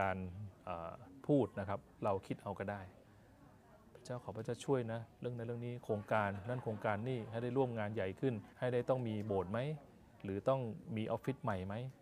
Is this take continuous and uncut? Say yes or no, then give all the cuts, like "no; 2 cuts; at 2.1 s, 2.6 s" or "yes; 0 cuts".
no; 1 cut; at 8.5 s